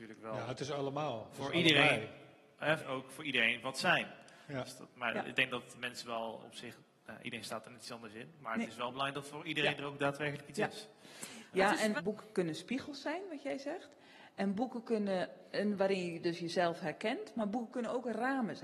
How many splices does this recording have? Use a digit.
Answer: 3